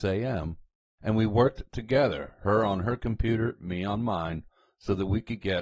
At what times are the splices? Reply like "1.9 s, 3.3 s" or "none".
none